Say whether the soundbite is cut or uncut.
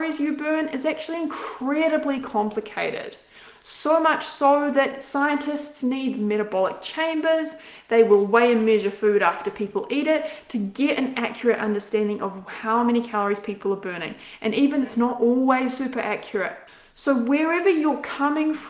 cut